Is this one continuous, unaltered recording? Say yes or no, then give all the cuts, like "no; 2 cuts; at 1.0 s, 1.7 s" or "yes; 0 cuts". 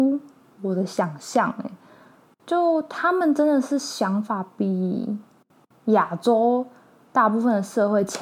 yes; 0 cuts